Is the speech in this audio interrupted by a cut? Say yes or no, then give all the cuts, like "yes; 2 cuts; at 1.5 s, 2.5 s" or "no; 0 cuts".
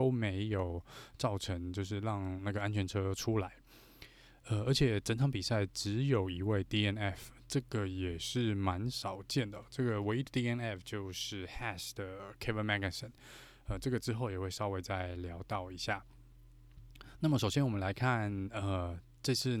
no; 0 cuts